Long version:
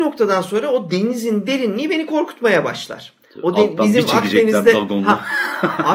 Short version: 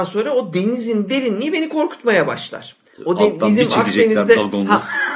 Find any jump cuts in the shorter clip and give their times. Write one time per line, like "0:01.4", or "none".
none